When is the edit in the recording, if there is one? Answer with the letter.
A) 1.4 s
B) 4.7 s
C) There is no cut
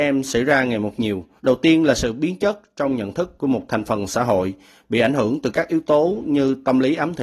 A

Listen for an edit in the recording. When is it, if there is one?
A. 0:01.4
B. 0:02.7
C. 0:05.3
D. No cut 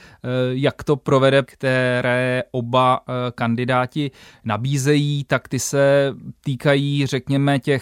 A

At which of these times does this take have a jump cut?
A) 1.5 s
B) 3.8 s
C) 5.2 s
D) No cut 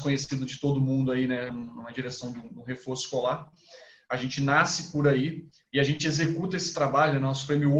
A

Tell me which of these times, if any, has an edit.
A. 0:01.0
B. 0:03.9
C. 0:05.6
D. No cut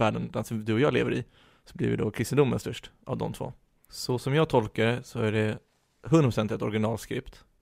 B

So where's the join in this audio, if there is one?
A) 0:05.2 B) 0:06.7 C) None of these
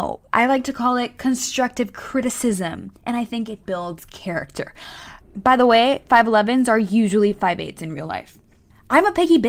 A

